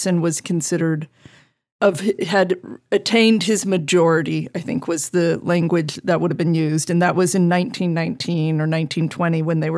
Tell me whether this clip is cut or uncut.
uncut